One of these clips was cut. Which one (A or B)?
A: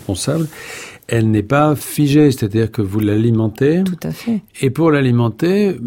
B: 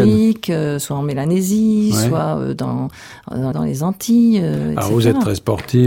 B